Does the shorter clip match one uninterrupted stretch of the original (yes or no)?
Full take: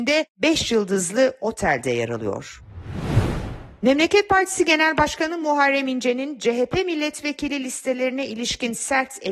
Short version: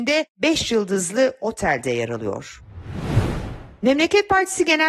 yes